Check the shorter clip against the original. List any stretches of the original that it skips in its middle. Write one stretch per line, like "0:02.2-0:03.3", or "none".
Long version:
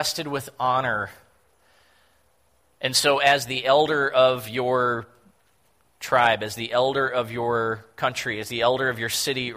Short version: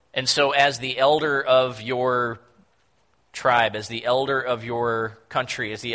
none